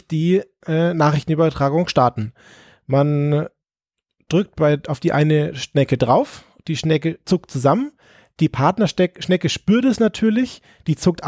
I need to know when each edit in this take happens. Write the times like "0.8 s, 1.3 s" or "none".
none